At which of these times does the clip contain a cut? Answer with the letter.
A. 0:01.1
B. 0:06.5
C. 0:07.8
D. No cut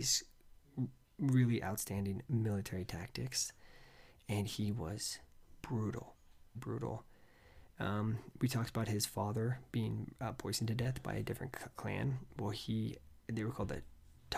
B